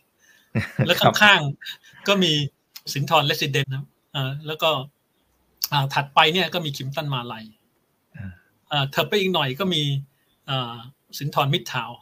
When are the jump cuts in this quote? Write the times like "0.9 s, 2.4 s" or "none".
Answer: 3.6 s